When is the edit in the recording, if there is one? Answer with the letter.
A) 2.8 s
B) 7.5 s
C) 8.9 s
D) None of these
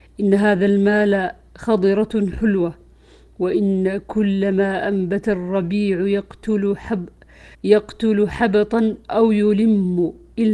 B